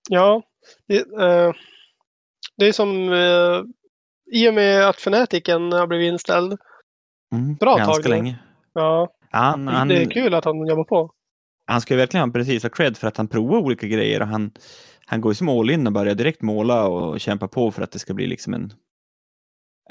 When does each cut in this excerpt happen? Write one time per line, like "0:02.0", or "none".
0:07.6